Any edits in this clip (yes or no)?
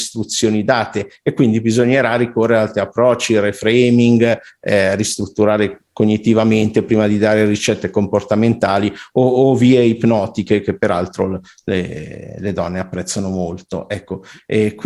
no